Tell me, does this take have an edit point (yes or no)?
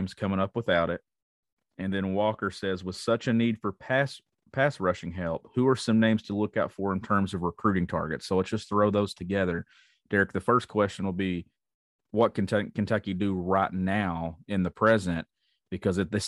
no